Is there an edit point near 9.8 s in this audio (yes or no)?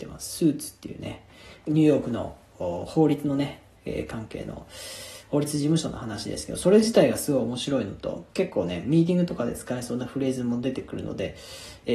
no